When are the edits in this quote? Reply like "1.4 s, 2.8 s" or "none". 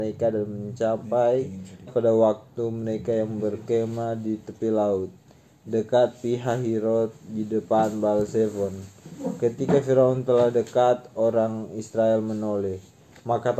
1.9 s

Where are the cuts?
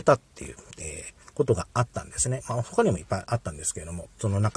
none

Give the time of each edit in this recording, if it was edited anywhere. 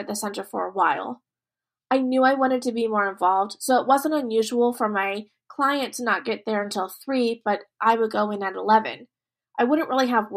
none

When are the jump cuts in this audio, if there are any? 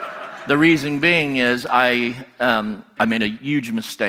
3.0 s

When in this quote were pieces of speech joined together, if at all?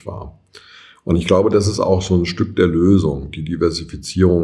none

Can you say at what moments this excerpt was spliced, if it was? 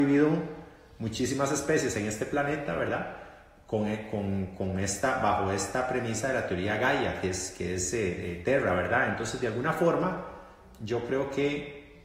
none

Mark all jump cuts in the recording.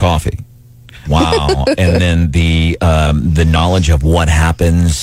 1.0 s

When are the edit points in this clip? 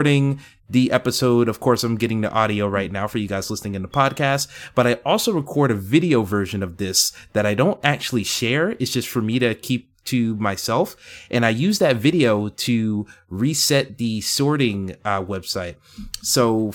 none

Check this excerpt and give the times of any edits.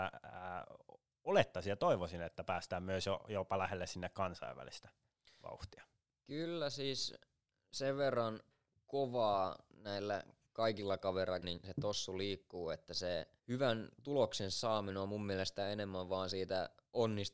11.4 s, 13.4 s

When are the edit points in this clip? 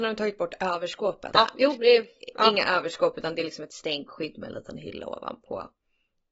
1.3 s

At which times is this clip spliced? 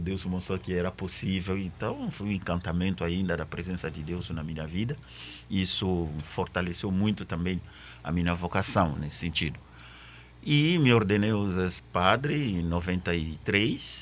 11.8 s

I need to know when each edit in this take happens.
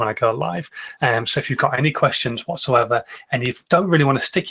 none

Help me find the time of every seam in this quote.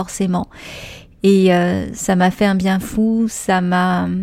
none

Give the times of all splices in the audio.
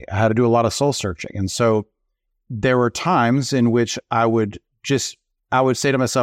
none

